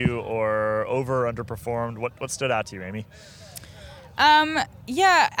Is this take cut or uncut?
uncut